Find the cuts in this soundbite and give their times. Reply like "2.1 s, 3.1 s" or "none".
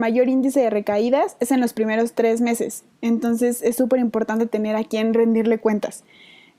none